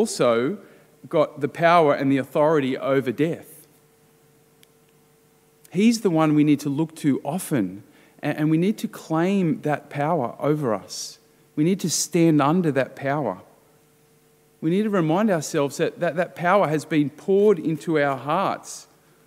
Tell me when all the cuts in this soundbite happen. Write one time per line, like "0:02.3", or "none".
none